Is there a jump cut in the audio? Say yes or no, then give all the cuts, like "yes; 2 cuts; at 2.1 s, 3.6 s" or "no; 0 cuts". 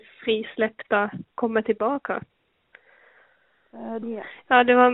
yes; 1 cut; at 4.0 s